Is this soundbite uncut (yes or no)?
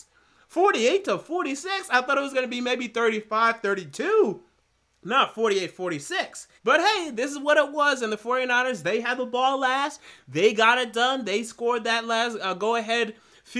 no